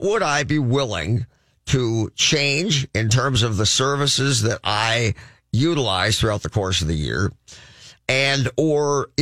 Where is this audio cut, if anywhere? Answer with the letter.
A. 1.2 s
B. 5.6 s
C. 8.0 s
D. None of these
C